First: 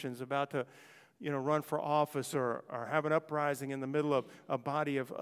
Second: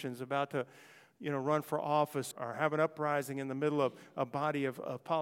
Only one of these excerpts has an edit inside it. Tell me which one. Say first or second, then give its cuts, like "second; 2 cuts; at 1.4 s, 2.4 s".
second; 1 cut; at 2.3 s